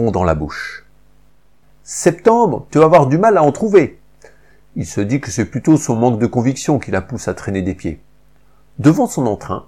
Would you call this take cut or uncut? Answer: cut